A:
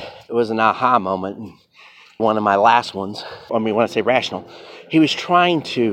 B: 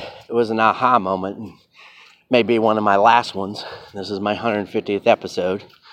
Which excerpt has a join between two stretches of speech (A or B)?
A